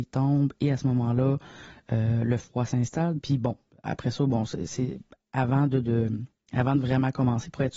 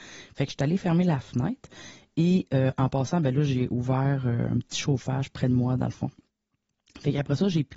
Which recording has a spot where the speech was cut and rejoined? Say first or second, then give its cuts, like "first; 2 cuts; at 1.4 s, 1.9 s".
first; 1 cut; at 3.2 s